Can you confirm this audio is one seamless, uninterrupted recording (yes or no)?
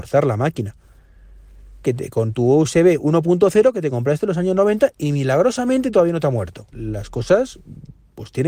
no